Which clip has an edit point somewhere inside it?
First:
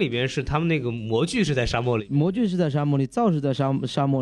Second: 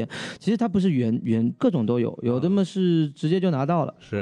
second; 1 cut; at 1.6 s

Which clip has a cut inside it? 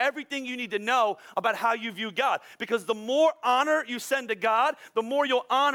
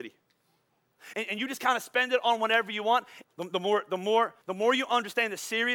second; 3 cuts; at 1.1 s, 3.2 s, 4.4 s

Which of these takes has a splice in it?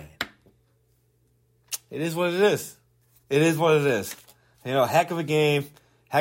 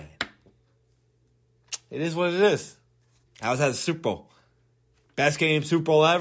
second; 1 cut; at 3.3 s

